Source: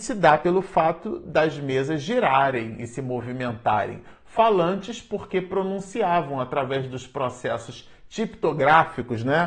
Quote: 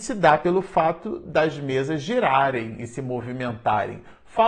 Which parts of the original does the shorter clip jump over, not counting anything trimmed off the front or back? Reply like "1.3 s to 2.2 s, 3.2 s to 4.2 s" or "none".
none